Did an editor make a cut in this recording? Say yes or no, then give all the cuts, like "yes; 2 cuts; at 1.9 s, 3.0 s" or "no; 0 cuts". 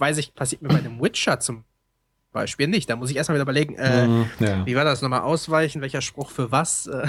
no; 0 cuts